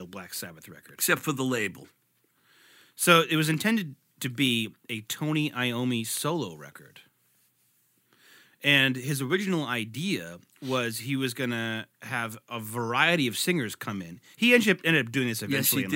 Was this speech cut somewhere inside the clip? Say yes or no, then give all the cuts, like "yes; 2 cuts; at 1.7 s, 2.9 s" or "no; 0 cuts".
no; 0 cuts